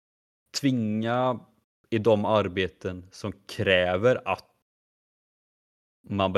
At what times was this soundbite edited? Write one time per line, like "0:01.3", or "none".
none